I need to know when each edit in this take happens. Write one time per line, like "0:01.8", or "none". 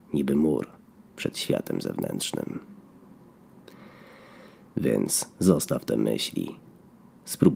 none